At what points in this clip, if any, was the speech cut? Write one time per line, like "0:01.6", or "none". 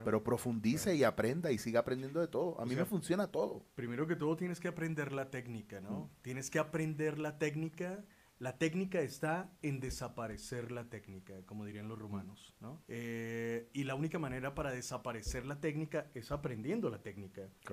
0:12.8